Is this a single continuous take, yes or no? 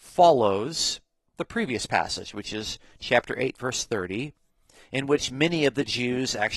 yes